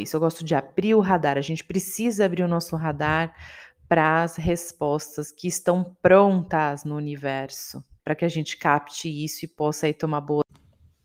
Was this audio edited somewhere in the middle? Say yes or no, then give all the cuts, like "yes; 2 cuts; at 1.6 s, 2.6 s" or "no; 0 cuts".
yes; 1 cut; at 8.0 s